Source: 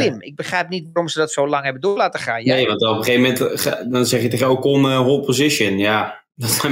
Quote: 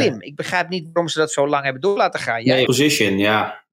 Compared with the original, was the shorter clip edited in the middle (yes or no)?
yes